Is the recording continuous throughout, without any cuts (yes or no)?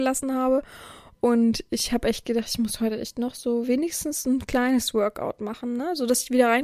yes